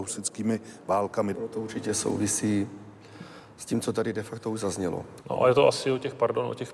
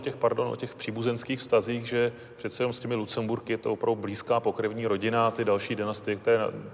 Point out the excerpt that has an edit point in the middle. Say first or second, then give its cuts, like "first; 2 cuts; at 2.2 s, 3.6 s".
first; 2 cuts; at 1.3 s, 5.2 s